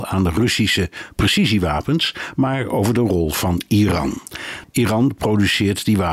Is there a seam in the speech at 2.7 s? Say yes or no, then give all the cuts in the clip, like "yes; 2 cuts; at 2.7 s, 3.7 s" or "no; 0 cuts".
no; 1 cut; at 4.6 s